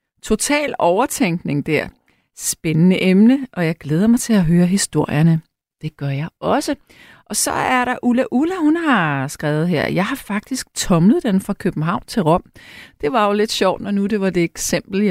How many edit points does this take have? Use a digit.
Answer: 0